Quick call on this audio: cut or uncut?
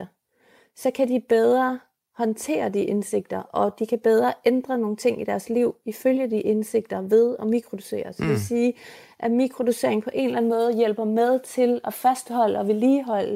uncut